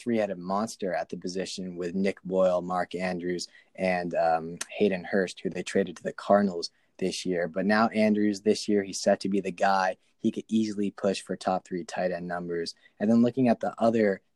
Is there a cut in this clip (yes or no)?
no